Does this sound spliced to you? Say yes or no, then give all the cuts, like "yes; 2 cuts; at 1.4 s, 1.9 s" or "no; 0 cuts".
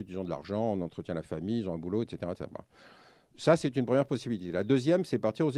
no; 0 cuts